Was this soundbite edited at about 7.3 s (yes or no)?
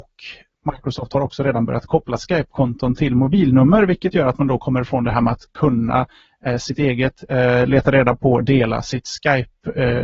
no